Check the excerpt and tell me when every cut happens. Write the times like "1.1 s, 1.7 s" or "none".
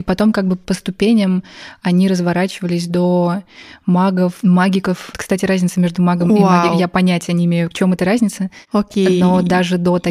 none

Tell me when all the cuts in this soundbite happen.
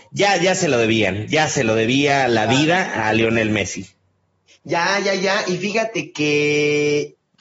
none

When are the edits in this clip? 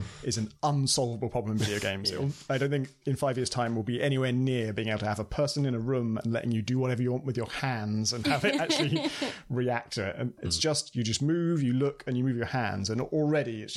10.4 s

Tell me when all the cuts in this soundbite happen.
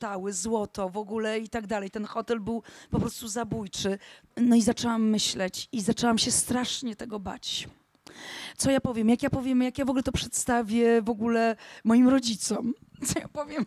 4.2 s

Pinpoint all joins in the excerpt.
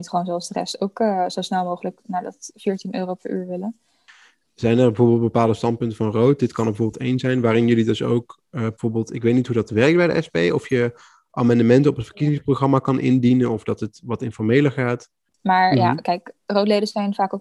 8.7 s, 15.4 s

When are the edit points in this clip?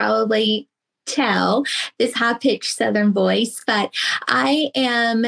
none

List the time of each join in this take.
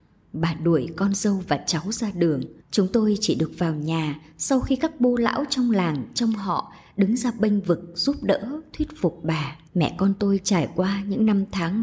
2.6 s, 9.7 s

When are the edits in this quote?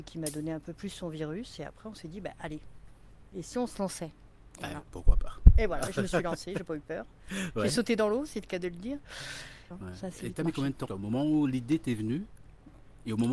9.7 s, 10.9 s

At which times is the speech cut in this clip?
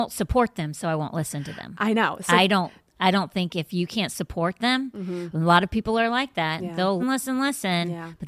7.0 s

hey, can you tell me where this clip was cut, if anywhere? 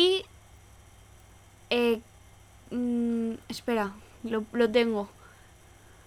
none

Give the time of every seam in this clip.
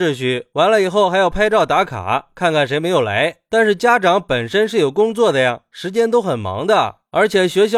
none

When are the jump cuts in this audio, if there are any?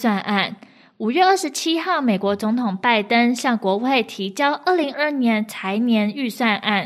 4.9 s

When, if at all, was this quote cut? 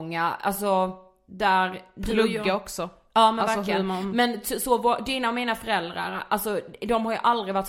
none

